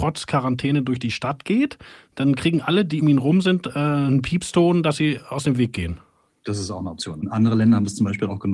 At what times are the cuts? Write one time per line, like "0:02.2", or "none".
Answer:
0:03.0
0:06.3

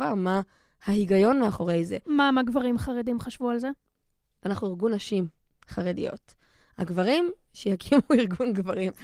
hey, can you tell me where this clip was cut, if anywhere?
0:04.4

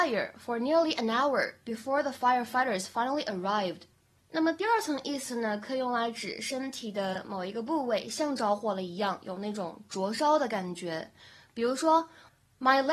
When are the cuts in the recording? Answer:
none

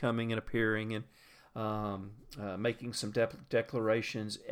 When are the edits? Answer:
none

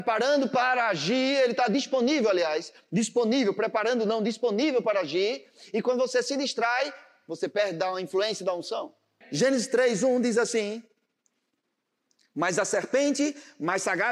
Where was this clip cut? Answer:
0:09.2

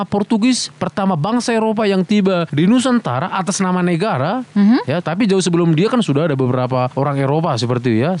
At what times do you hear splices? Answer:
0:05.0

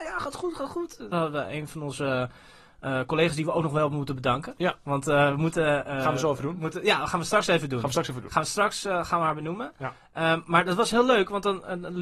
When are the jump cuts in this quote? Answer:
0:01.1

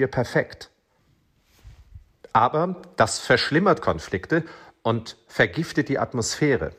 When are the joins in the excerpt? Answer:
none

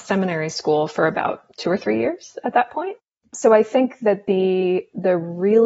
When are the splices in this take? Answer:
none

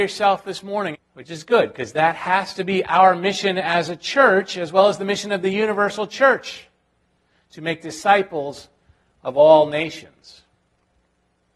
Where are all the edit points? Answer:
0:00.9

